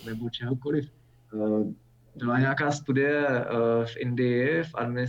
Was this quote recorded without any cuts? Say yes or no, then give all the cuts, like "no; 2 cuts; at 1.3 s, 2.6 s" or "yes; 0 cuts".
yes; 0 cuts